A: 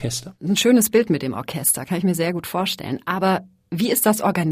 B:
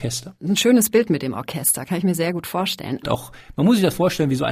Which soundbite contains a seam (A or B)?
B